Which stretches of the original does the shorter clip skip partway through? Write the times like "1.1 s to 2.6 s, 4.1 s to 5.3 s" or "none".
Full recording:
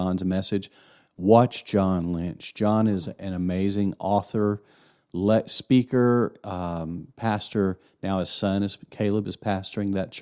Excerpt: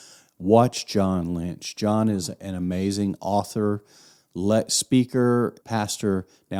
6.4 s to 7.1 s